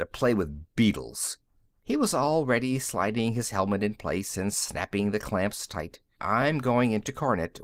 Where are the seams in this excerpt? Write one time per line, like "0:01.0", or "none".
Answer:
0:01.8
0:06.2